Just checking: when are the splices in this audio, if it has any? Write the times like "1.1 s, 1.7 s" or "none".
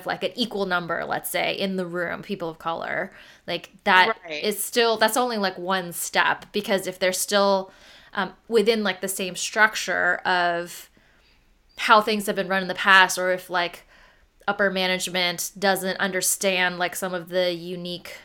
none